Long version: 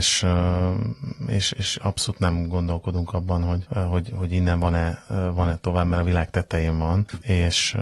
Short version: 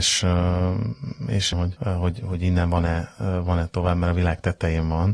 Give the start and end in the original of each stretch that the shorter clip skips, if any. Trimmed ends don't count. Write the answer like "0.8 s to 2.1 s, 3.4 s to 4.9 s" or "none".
1.5 s to 3.4 s

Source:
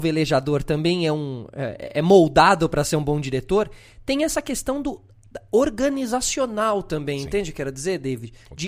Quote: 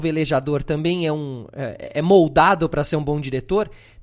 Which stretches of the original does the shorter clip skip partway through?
none

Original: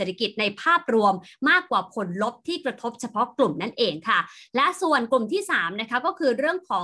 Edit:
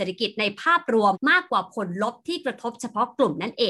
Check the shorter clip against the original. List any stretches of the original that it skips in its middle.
1.1 s to 1.3 s

